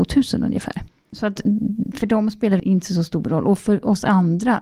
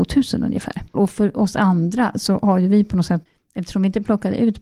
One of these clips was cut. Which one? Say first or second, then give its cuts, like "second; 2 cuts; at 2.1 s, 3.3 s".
second; 1 cut; at 0.9 s